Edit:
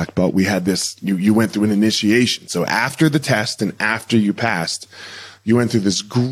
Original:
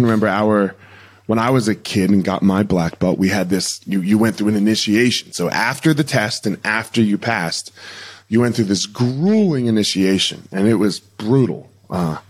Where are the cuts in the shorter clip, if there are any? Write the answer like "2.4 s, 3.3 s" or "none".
none